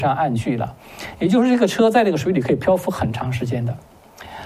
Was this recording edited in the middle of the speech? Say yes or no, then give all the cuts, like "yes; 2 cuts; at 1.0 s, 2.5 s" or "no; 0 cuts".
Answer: no; 0 cuts